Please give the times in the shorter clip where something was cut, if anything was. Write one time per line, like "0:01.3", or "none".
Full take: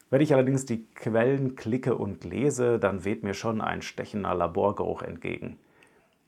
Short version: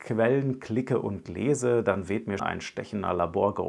0:02.4